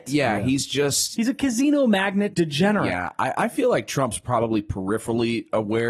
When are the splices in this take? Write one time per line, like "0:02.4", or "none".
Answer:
0:02.3